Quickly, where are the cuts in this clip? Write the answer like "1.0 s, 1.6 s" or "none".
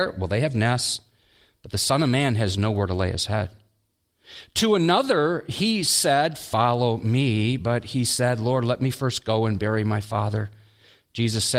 none